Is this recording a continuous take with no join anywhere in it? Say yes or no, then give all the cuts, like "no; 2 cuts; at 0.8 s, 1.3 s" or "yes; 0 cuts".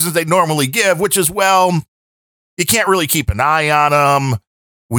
yes; 0 cuts